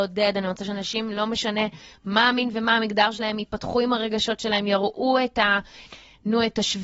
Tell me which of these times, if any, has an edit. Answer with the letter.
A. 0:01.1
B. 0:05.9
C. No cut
B